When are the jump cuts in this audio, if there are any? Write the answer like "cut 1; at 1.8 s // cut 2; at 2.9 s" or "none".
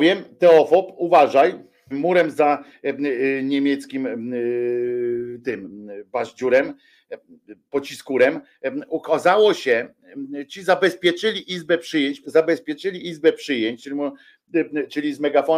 cut 1; at 1.9 s // cut 2; at 12.2 s // cut 3; at 13.8 s